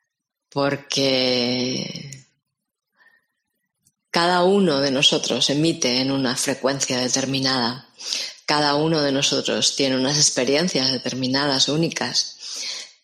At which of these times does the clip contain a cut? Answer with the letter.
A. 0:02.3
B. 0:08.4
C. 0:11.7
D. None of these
D